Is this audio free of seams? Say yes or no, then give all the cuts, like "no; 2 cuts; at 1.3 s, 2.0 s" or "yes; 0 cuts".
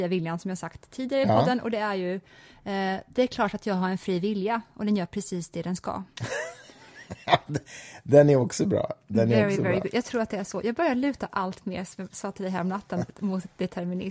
yes; 0 cuts